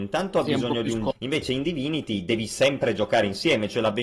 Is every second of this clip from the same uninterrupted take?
no; 1 cut; at 1.1 s

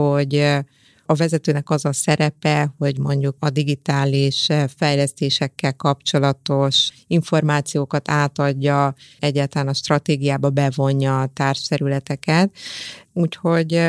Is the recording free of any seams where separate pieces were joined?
no; 2 cuts; at 3.4 s, 9.2 s

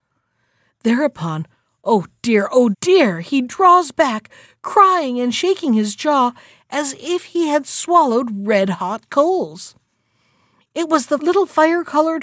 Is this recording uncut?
no; 1 cut; at 2.7 s

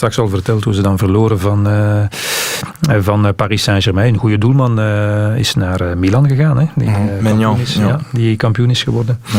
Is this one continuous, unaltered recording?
yes; 0 cuts

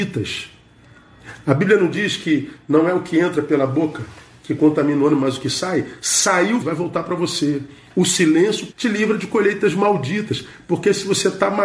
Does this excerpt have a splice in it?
yes; 2 cuts; at 6.6 s, 8.7 s

